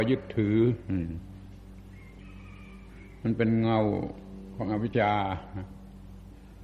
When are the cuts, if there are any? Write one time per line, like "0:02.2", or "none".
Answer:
0:04.9